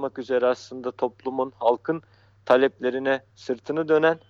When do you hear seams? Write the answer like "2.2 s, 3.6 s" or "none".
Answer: 3.3 s